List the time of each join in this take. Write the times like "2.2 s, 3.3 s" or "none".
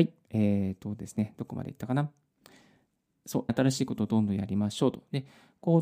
3.5 s